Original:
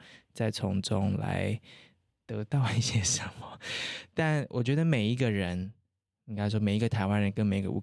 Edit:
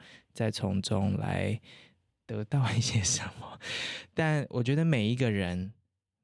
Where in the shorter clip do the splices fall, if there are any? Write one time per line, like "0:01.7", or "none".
none